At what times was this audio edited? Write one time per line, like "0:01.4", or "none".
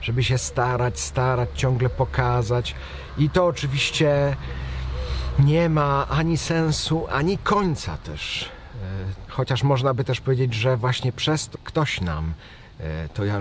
0:09.3
0:11.5